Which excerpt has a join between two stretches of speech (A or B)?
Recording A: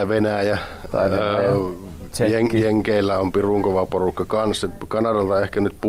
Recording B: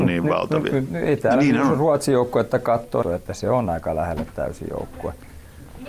B